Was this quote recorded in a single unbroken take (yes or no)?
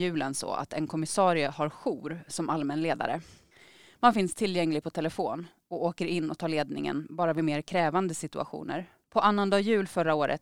yes